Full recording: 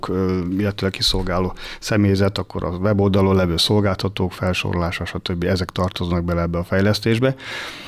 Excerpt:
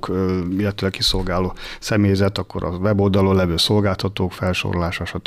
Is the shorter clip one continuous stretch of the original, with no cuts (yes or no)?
yes